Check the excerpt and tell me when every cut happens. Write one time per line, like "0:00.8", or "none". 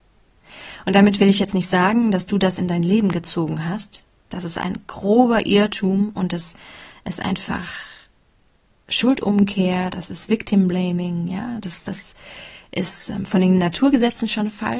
none